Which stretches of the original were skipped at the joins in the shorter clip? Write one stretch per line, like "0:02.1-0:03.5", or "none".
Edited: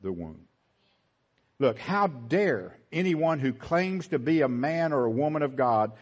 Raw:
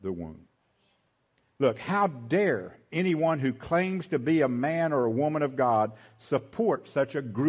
none